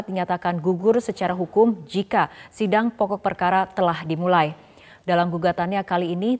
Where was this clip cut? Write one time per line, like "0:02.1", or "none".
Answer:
0:05.0